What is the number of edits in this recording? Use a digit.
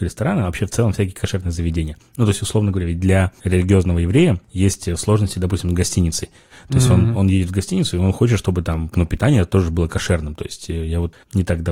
0